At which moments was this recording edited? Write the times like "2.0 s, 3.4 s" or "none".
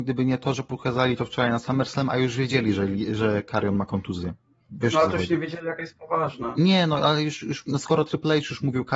none